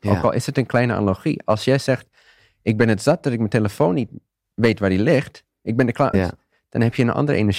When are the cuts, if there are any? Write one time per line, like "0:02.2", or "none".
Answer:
0:06.1

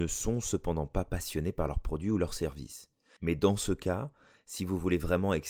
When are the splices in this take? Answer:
0:03.2

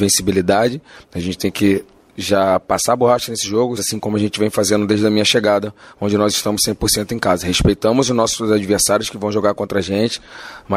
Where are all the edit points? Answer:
0:01.0
0:03.8

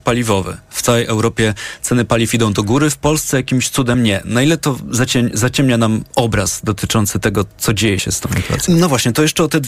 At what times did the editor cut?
0:08.7

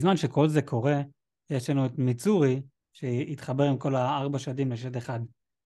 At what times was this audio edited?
0:02.8

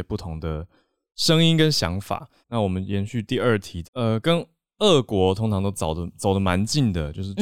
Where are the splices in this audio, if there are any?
0:02.4
0:03.8

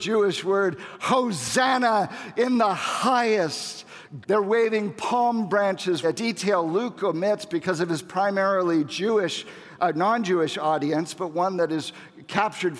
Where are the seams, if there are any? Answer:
0:01.0
0:04.2
0:06.0

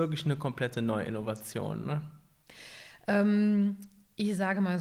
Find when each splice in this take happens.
none

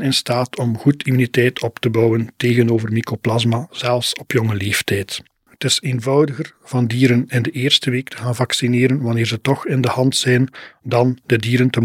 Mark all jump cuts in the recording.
0:05.5

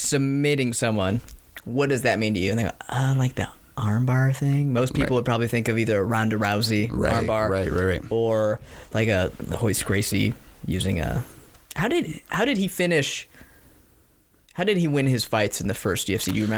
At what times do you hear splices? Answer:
none

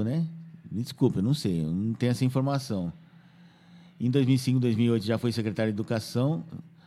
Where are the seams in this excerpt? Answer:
none

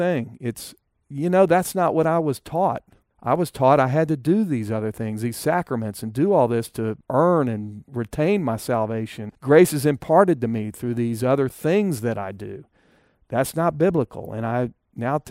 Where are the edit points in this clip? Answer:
none

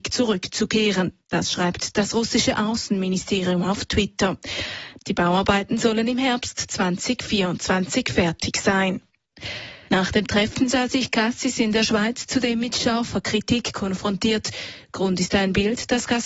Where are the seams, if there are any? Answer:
0:05.0
0:09.9

